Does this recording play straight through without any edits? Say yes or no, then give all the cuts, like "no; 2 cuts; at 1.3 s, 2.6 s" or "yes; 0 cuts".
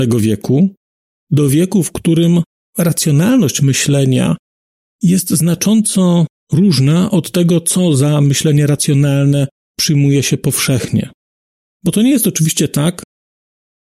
yes; 0 cuts